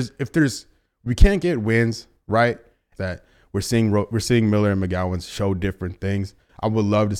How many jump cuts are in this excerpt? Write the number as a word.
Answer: one